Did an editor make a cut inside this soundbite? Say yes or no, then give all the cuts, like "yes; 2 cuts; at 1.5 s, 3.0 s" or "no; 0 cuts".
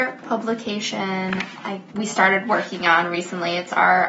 yes; 1 cut; at 1.9 s